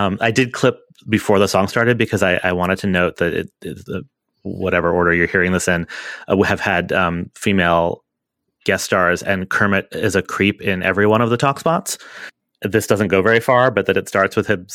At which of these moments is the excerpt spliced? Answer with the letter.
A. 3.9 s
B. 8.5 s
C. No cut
A